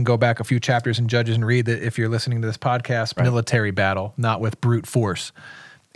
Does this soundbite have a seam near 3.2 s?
yes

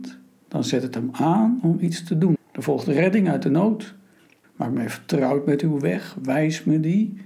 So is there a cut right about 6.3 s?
no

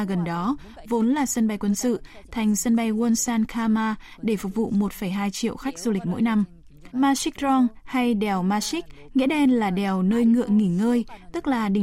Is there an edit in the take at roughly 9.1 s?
no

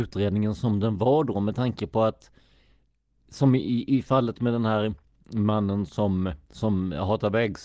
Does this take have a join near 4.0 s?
no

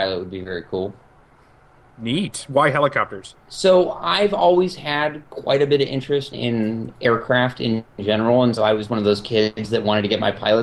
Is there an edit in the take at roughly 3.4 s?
yes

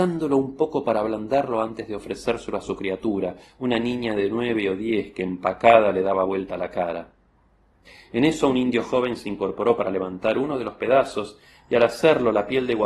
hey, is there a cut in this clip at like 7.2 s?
no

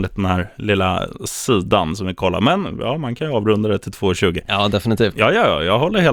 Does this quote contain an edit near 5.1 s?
yes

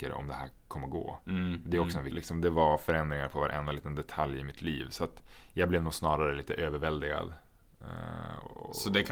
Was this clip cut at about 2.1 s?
yes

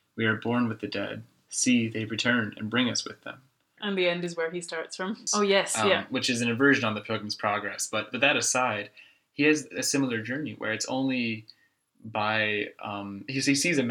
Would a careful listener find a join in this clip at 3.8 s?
yes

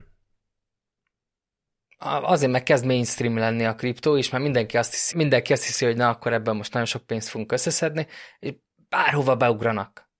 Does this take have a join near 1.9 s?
no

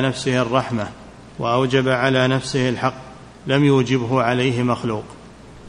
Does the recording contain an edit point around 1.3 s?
yes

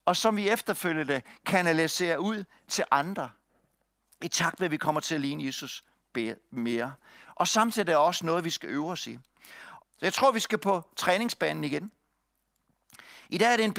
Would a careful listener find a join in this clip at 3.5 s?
no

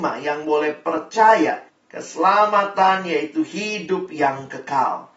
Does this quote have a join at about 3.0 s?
no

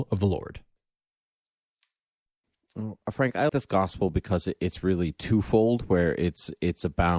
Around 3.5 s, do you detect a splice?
yes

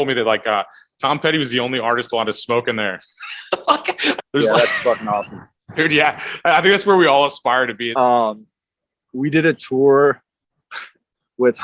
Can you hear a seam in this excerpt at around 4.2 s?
yes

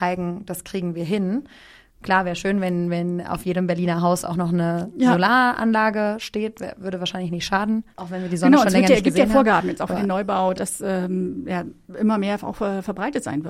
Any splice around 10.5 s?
yes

